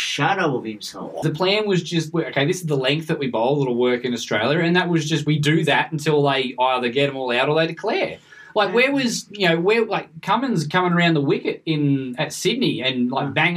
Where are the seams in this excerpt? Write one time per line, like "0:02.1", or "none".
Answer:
0:01.2